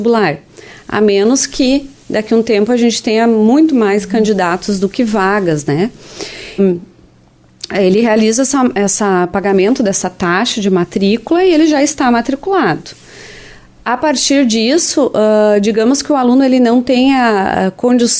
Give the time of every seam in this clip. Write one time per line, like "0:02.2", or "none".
0:06.6